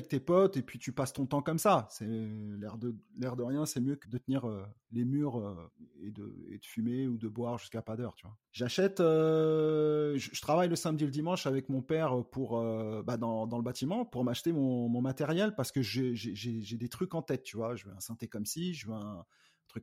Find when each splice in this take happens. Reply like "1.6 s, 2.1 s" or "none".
4.0 s